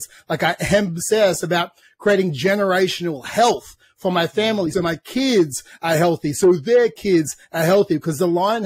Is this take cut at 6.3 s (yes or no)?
no